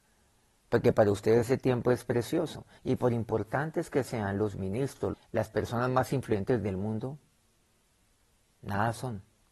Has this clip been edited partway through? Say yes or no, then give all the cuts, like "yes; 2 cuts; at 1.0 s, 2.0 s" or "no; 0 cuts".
yes; 2 cuts; at 2.8 s, 5.1 s